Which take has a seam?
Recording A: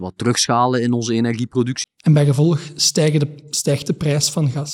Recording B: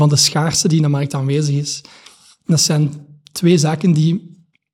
A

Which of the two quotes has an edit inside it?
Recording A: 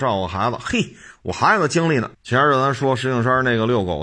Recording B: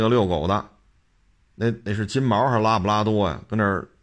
A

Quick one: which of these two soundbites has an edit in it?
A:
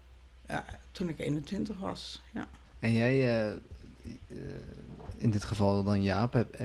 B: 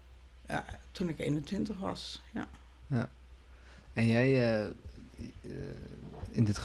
A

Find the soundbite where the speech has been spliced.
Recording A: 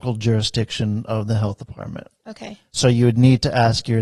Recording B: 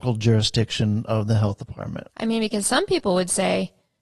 B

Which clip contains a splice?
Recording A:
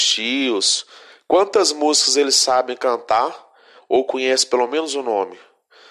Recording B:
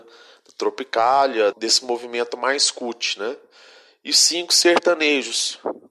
B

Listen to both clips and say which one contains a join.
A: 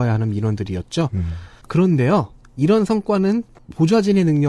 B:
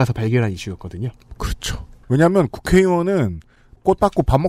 B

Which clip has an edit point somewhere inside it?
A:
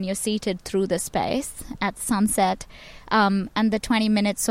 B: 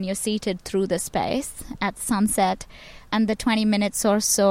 B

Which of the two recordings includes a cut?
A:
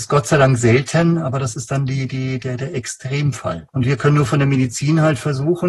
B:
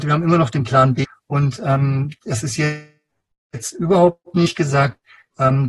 A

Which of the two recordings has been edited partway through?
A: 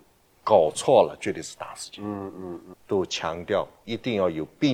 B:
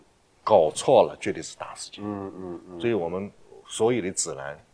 A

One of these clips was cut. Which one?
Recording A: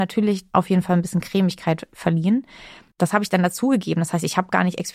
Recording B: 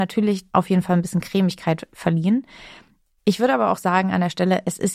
A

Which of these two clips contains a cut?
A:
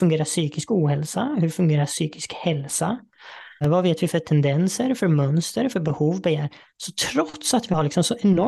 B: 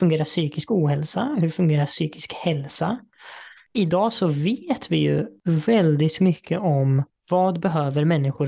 B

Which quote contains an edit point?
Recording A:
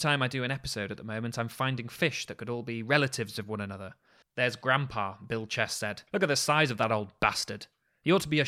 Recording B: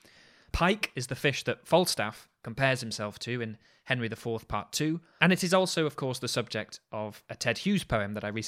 A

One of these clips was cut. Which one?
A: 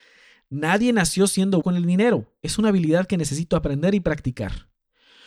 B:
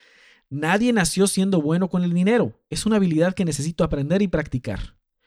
A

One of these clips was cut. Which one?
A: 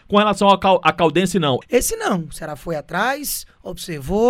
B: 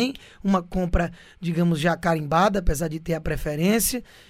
A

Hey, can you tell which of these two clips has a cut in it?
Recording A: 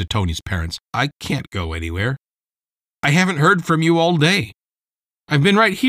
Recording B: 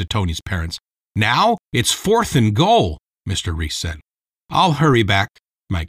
A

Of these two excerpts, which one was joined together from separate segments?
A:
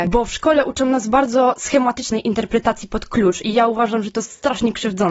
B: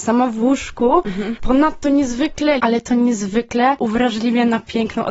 B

